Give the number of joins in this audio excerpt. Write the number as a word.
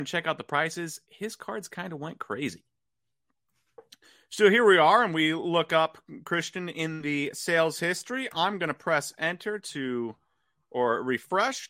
one